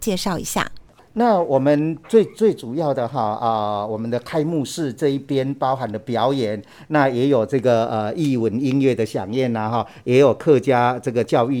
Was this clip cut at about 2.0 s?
no; 0 cuts

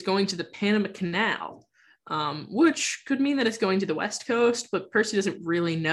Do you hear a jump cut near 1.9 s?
no; 0 cuts

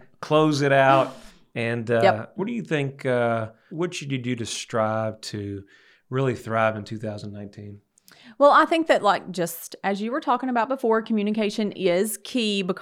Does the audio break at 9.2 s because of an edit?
no; 2 cuts; at 2.4 s, 3.7 s

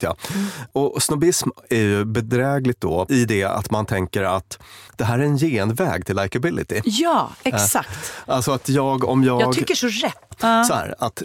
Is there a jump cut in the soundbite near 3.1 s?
yes; 2 cuts; at 3.1 s, 10.3 s

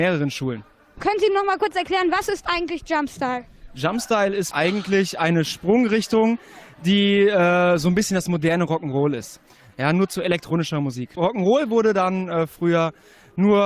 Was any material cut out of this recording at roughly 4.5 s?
yes; 1 cut; at 4.5 s

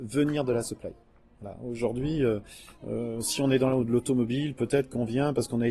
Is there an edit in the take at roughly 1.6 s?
no; 0 cuts

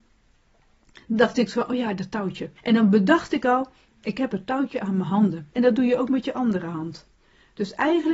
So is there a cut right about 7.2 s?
no; 2 cuts; at 2.6 s, 5.5 s

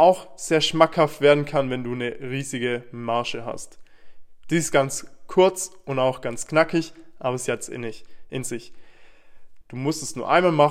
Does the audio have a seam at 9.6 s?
yes; 2 cuts; at 4.4 s, 9.6 s

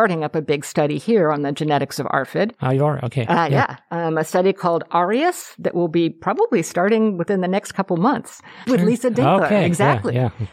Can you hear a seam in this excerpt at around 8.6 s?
yes; 1 cut; at 8.6 s

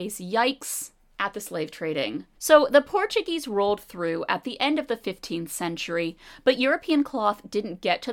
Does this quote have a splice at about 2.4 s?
yes; 1 cut; at 2.4 s

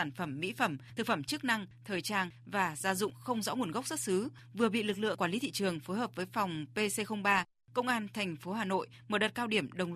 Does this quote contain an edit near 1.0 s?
no; 0 cuts

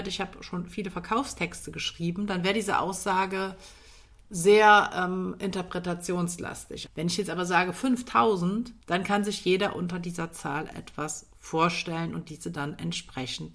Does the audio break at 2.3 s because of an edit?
no; 2 cuts; at 6.9 s, 8.8 s

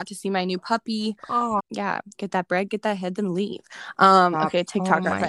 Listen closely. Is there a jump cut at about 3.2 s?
no; 1 cut; at 1.6 s

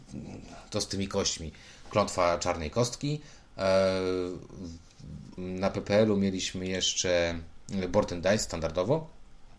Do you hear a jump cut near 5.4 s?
yes; 1 cut; at 5.4 s

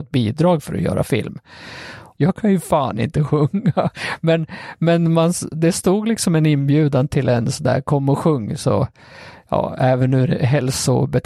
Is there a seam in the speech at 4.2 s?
no; 1 cut; at 2.2 s

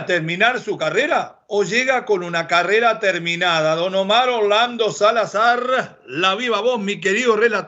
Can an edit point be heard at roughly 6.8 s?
no; 0 cuts

